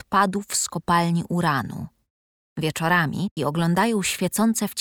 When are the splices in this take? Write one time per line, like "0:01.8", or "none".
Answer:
0:03.4